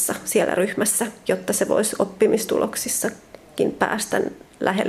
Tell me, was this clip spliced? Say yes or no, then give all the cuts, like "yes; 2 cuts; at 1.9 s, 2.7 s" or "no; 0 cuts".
no; 0 cuts